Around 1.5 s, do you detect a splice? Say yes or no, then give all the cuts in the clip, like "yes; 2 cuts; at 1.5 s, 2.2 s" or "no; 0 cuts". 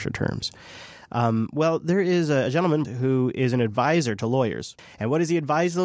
no; 2 cuts; at 2.8 s, 4.8 s